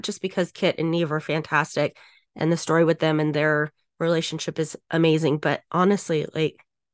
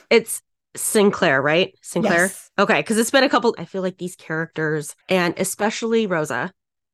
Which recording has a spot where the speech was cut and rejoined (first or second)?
second